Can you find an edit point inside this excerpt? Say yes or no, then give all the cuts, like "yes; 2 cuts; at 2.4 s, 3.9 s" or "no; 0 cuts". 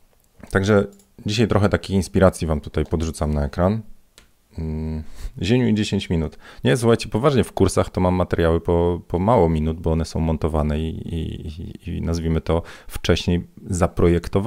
no; 0 cuts